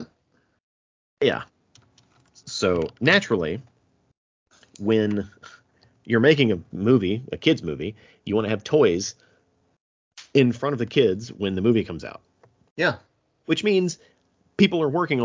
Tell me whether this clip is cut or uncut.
uncut